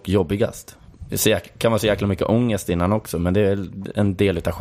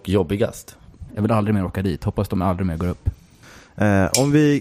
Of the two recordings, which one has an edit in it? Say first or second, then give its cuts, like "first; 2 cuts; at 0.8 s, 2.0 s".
second; 1 cut; at 1.1 s